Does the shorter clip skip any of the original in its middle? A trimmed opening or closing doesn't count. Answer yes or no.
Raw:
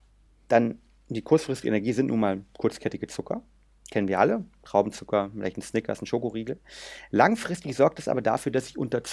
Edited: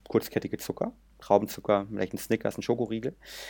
yes